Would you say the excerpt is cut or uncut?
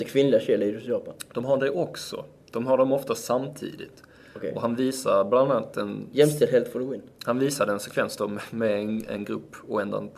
uncut